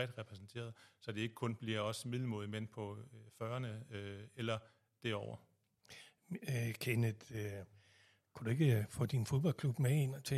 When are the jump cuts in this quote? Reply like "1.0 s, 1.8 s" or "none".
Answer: none